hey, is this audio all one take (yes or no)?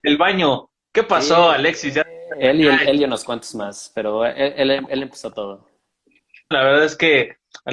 no